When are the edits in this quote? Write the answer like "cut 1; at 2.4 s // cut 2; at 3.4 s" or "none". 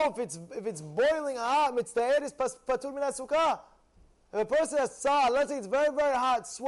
none